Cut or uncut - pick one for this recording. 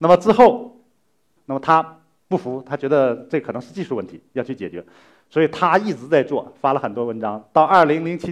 cut